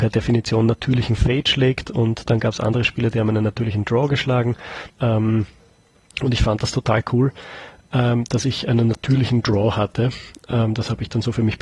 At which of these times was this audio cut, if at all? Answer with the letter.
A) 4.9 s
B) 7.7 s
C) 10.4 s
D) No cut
A